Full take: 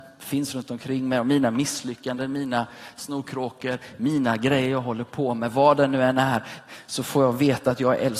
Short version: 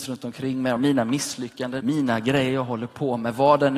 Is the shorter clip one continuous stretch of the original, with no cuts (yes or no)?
no